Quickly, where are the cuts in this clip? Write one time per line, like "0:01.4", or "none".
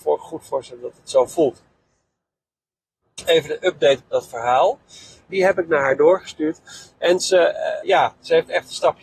0:05.3
0:07.8